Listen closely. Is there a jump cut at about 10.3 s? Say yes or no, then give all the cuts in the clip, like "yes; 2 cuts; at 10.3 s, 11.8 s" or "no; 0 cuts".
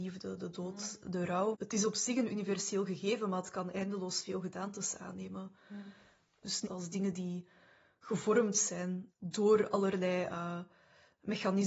no; 2 cuts; at 1.5 s, 6.7 s